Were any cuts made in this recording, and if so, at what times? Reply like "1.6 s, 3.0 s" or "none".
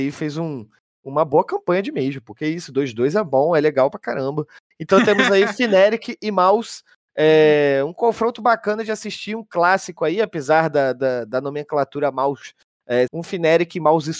13.1 s